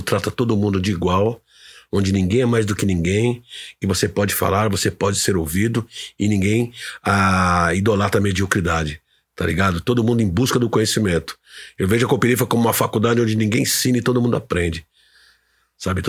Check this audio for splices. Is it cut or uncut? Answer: uncut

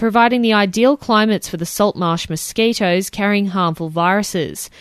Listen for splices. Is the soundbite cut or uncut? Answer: uncut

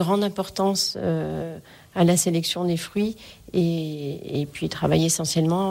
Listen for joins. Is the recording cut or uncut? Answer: uncut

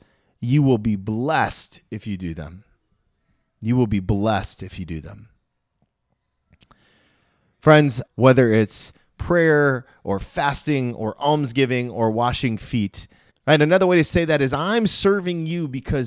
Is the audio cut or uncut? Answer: cut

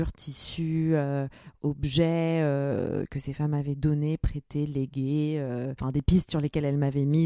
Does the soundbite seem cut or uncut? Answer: uncut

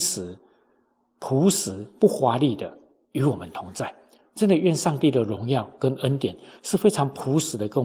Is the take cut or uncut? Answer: uncut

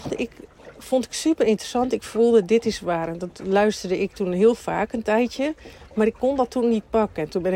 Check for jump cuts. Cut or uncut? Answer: uncut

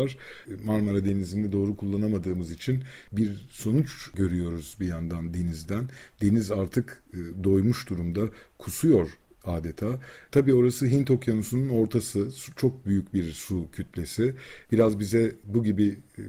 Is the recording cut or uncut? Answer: uncut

